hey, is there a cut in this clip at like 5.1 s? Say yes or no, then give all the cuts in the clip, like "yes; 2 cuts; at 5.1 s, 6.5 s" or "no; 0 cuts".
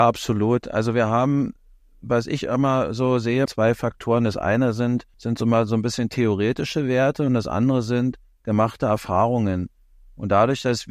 yes; 2 cuts; at 3.5 s, 5.1 s